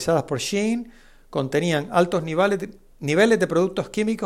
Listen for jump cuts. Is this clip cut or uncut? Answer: uncut